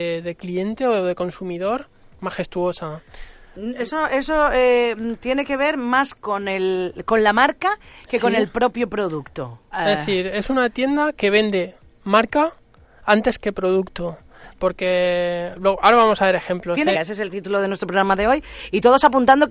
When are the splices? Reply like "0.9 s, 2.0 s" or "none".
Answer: 9.7 s, 16.9 s